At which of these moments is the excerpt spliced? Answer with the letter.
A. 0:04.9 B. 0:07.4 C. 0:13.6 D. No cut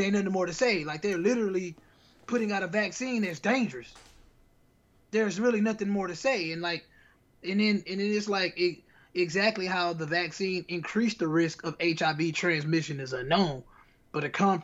D